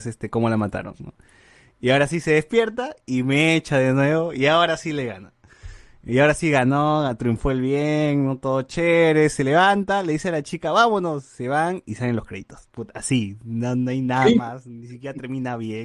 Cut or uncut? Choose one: uncut